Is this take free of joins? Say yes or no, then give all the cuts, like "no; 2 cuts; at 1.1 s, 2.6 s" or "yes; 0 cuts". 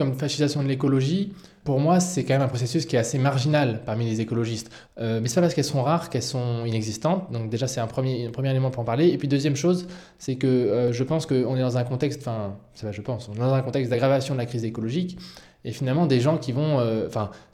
no; 2 cuts; at 1.6 s, 4.8 s